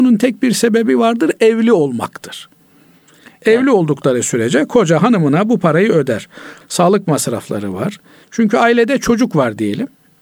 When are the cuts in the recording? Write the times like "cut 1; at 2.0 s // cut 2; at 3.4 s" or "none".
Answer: cut 1; at 6.6 s // cut 2; at 8.2 s